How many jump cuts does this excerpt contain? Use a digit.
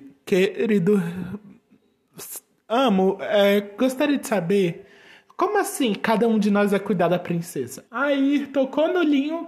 1